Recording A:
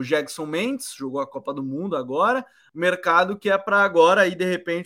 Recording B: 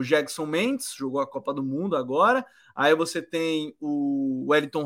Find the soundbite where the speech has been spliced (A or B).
A